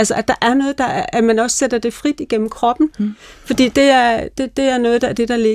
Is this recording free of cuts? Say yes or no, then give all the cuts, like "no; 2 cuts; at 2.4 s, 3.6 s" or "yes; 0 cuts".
yes; 0 cuts